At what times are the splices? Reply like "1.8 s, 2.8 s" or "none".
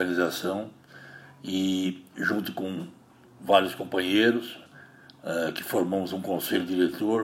none